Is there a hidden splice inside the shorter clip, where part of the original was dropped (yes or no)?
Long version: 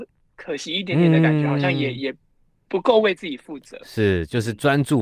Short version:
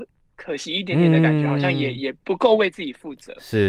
yes